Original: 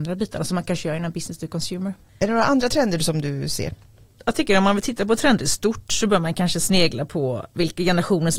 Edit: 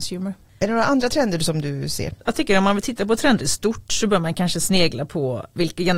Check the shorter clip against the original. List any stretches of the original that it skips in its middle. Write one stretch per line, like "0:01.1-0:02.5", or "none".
0:03.8-0:04.2